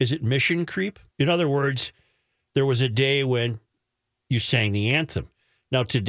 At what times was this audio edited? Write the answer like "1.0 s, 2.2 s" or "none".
1.1 s